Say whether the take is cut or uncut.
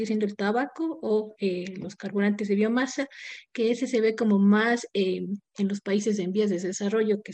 uncut